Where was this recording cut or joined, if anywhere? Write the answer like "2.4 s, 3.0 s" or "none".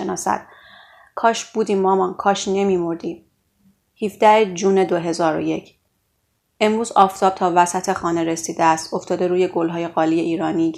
none